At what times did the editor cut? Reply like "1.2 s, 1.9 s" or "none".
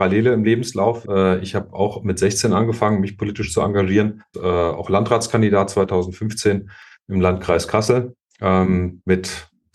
1.0 s, 4.3 s